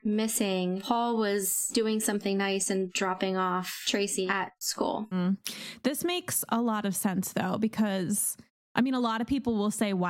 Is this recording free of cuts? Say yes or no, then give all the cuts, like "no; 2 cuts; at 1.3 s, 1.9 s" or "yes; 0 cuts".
yes; 0 cuts